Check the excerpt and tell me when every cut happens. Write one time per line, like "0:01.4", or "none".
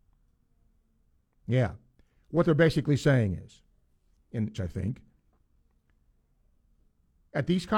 0:04.5